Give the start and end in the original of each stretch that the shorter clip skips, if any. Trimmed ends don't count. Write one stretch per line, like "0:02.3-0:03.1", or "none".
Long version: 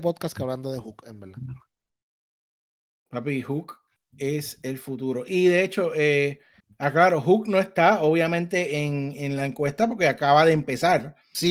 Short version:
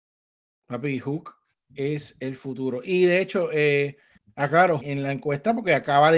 0:07.2-0:09.1